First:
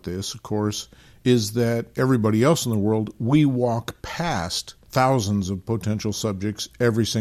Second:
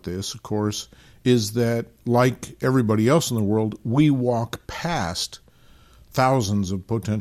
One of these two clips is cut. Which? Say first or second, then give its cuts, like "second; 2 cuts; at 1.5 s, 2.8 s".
first; 2 cuts; at 1.9 s, 4.8 s